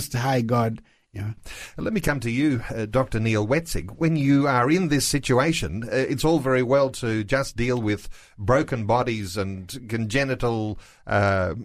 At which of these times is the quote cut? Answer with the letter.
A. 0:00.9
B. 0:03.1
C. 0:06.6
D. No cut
D